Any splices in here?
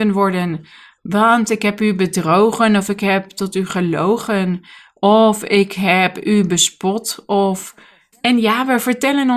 yes; 1 cut; at 8.1 s

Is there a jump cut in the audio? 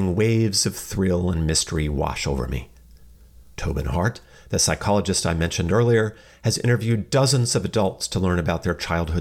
yes; 1 cut; at 3.5 s

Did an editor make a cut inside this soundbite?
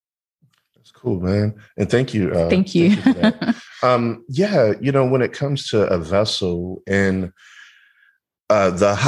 no; 0 cuts

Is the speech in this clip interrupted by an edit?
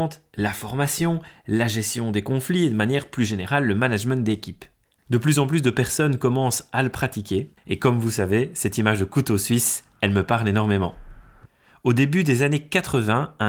yes; 2 cuts; at 5.0 s, 7.6 s

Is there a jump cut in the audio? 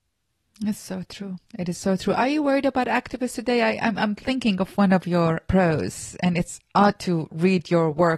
no; 0 cuts

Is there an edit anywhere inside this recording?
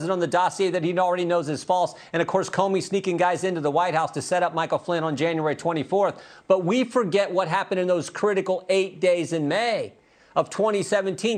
no; 0 cuts

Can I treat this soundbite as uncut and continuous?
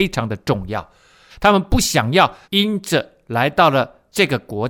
no; 2 cuts; at 1.3 s, 2.4 s

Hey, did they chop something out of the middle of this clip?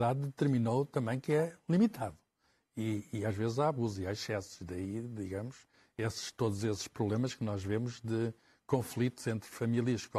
no; 0 cuts

